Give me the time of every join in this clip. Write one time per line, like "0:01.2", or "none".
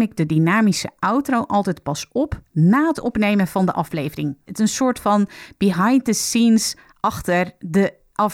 0:04.5